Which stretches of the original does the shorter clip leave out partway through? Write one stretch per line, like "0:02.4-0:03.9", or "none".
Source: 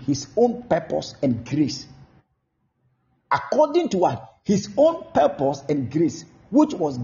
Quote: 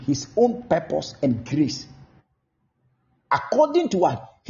none